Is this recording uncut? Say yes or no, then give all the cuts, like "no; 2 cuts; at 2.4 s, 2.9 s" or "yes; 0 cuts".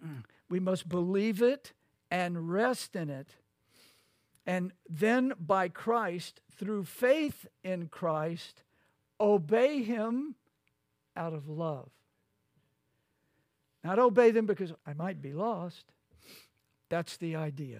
no; 2 cuts; at 14.8 s, 16.7 s